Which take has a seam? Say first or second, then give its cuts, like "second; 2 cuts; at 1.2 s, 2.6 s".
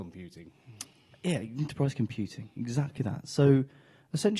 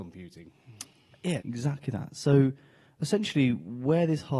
second; 1 cut; at 1.4 s